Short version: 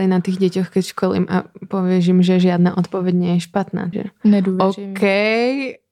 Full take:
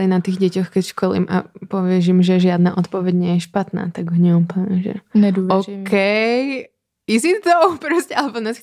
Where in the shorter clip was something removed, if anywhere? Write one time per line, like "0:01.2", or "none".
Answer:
0:03.9